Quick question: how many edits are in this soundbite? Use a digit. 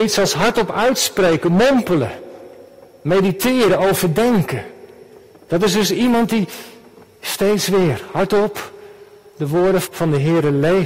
2